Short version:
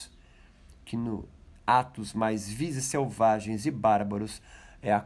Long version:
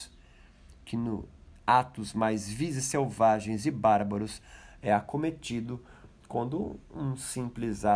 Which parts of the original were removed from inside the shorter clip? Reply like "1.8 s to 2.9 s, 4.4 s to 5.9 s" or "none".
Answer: none